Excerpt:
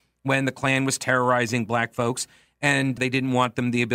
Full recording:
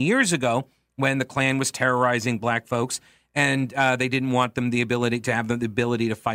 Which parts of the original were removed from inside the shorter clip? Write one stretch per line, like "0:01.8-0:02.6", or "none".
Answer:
0:03.7-0:04.0